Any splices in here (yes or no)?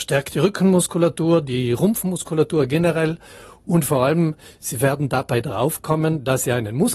no